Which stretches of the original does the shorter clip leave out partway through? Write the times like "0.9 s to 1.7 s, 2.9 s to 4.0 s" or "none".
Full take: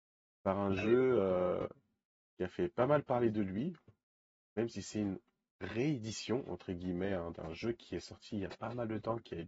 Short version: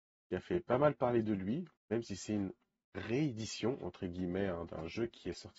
3.8 s to 4.4 s